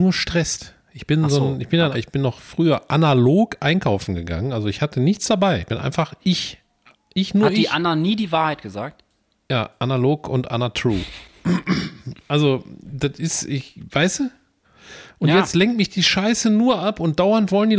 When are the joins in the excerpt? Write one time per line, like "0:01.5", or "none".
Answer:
0:01.9